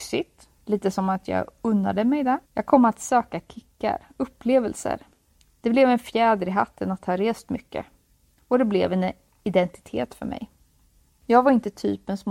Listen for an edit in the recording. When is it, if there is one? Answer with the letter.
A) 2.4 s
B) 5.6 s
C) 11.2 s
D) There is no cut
A